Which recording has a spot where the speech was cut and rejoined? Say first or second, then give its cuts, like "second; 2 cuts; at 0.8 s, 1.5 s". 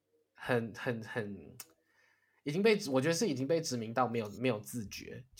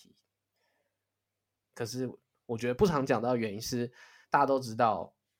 second; 2 cuts; at 1.7 s, 2.7 s